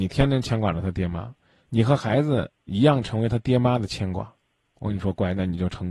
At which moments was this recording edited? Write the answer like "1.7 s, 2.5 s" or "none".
4.7 s